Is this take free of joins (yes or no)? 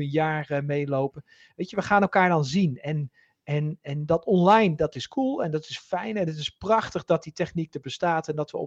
yes